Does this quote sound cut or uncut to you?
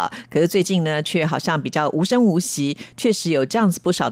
uncut